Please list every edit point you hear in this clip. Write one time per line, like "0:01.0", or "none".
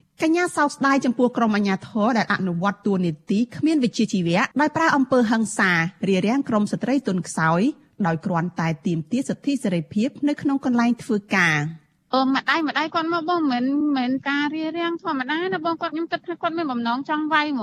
0:04.5